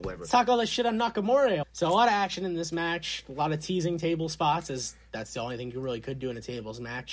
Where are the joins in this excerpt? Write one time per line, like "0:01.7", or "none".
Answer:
0:01.6